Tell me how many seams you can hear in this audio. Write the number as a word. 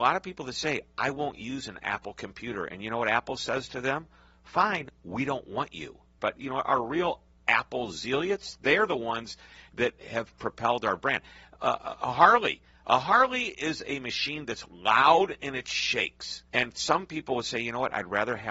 two